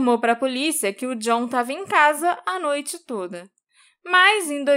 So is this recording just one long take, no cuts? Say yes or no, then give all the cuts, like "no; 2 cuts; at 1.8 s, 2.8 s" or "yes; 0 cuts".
yes; 0 cuts